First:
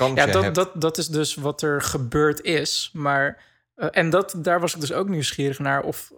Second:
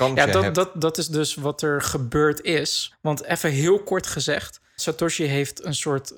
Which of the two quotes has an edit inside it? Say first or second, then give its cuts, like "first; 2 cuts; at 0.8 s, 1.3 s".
second; 2 cuts; at 2.9 s, 4.8 s